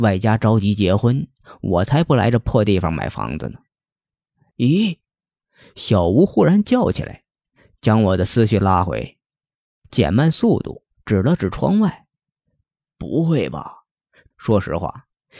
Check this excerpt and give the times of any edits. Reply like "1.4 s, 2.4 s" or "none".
14.3 s